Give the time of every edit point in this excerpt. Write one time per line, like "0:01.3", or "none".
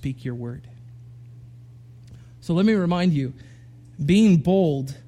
none